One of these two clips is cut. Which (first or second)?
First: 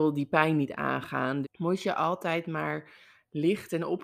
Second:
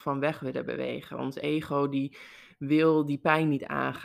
first